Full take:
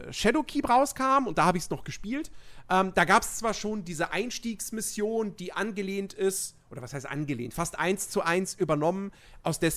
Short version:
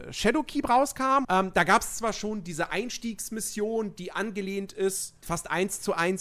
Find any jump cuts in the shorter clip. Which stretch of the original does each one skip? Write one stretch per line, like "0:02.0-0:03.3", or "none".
0:01.2-0:02.7
0:06.6-0:07.5